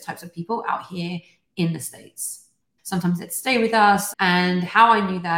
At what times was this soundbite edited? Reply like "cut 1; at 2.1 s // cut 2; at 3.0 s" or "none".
cut 1; at 2.8 s // cut 2; at 4.1 s